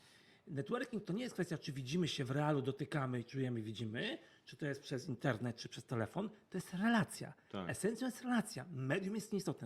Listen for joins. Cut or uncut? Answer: uncut